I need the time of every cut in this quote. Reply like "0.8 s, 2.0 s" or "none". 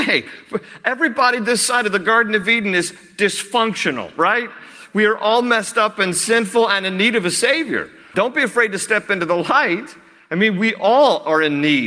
8.1 s